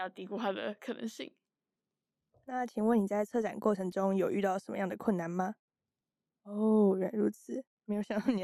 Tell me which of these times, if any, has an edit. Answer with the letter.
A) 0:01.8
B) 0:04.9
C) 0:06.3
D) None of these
C